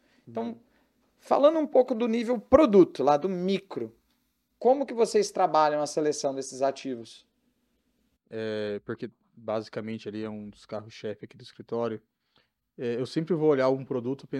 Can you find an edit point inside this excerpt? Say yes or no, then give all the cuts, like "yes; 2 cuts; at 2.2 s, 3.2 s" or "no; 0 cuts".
yes; 1 cut; at 8.2 s